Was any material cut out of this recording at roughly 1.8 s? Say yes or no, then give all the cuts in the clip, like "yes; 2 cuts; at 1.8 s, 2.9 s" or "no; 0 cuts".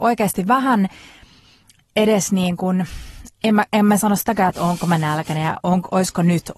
no; 1 cut; at 4.5 s